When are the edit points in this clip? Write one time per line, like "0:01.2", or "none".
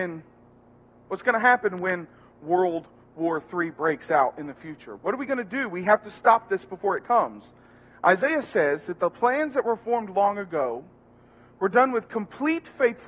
none